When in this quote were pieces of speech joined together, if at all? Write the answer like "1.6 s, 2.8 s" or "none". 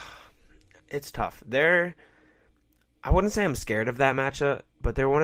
none